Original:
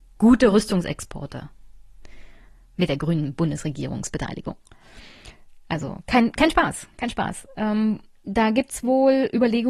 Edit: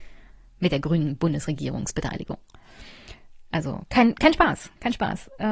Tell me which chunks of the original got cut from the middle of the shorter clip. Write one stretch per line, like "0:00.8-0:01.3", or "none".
none